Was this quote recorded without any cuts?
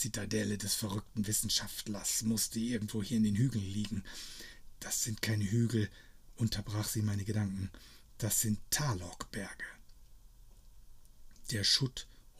yes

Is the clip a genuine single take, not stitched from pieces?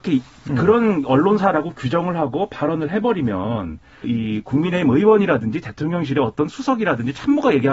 no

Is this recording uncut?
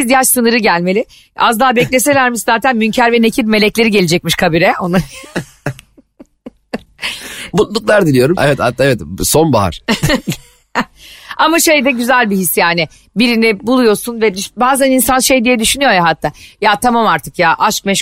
no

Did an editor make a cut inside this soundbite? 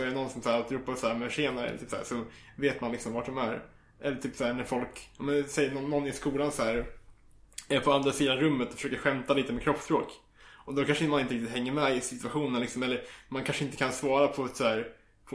no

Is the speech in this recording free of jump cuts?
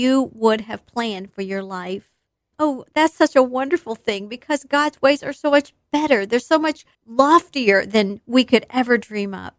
no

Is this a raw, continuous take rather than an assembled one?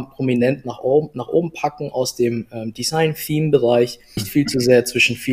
no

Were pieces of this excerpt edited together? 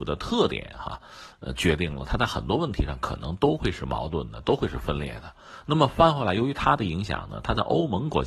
no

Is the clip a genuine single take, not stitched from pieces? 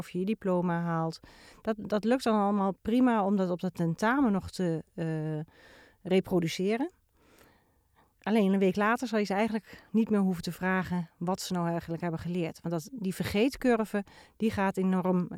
no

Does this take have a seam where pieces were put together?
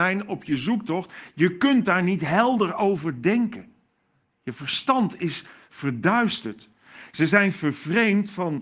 no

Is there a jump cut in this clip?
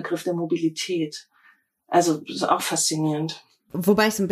no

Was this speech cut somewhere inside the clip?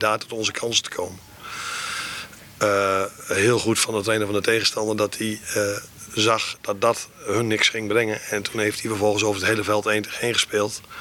no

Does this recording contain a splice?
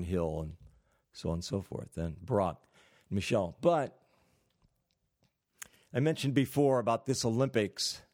no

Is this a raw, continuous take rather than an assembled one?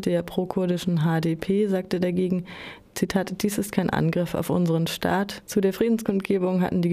no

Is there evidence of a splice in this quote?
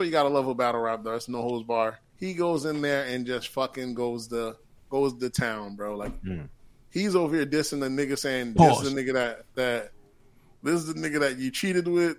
yes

